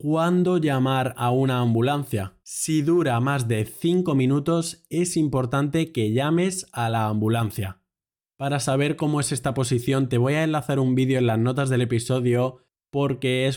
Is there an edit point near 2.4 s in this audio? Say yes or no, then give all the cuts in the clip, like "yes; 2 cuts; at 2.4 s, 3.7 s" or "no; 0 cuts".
yes; 2 cuts; at 2.4 s, 8.2 s